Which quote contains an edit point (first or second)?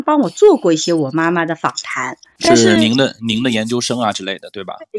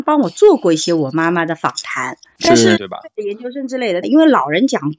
second